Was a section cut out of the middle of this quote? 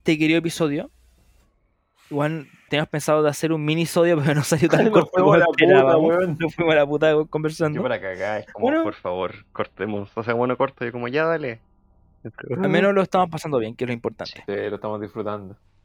yes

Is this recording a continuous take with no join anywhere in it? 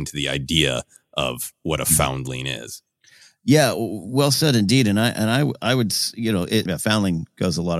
no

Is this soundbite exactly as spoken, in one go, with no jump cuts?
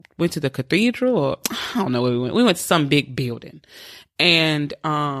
yes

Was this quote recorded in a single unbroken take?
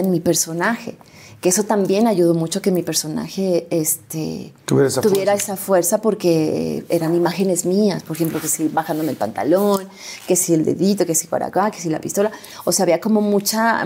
yes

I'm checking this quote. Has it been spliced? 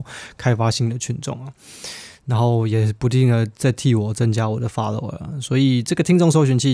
no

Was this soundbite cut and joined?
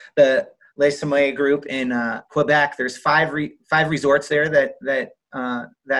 no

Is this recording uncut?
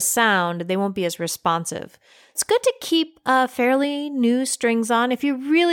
yes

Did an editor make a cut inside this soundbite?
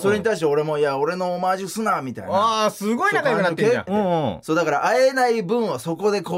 yes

